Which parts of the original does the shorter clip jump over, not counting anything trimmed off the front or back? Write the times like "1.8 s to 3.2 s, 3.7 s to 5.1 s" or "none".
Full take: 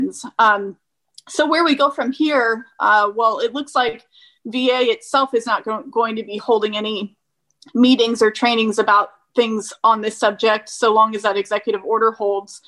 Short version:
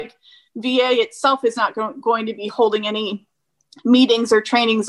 none